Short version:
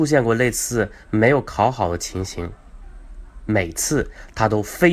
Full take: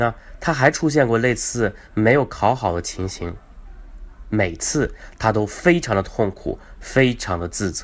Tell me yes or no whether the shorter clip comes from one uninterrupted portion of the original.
yes